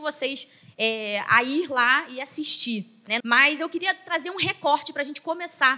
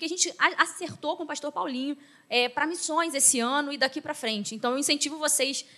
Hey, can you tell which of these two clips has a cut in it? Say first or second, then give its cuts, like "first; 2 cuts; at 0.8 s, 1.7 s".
first; 1 cut; at 3.2 s